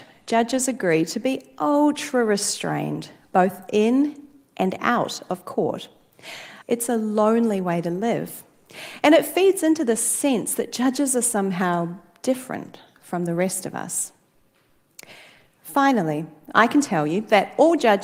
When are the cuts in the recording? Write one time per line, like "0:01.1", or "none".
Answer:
0:06.6